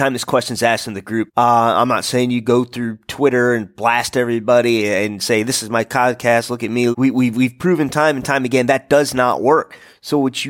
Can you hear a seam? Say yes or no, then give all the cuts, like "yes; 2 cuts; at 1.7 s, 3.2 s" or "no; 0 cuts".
yes; 2 cuts; at 1.3 s, 6.9 s